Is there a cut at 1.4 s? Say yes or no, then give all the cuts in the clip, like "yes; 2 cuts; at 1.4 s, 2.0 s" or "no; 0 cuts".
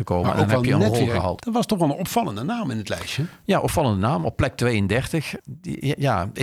yes; 1 cut; at 1.4 s